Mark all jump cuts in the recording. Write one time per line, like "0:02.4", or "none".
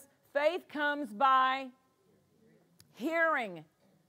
none